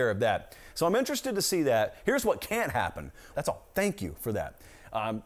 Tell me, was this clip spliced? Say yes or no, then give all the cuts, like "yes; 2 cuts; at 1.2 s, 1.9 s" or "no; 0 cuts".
yes; 1 cut; at 3.3 s